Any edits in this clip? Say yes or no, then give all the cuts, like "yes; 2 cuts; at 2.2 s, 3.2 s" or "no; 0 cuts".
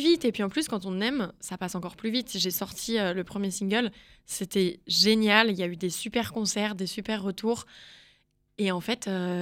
no; 0 cuts